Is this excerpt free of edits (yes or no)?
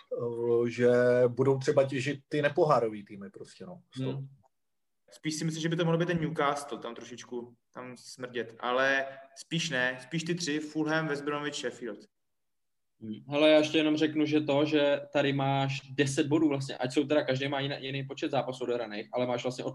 no